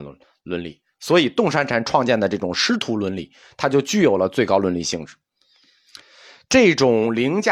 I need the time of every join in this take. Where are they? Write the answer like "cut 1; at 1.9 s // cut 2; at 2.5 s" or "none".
none